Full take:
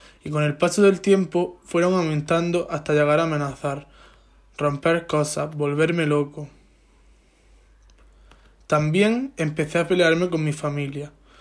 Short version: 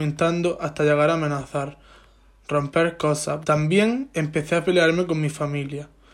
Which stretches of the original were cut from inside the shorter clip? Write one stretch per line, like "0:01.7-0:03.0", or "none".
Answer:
0:05.5-0:08.7

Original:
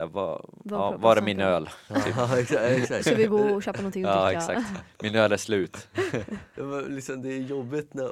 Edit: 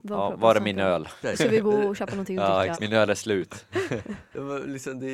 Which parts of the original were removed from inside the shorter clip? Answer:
0:01.8-0:02.9
0:04.4-0:05.0

